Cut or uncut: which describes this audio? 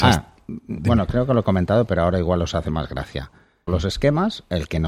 cut